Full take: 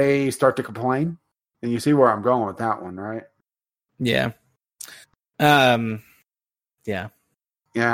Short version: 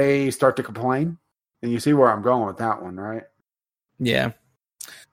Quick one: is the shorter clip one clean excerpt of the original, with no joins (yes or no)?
yes